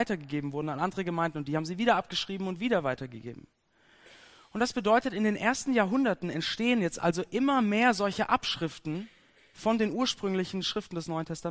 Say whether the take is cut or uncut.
uncut